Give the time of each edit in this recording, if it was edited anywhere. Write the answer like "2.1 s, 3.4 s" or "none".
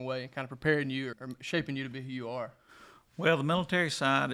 1.1 s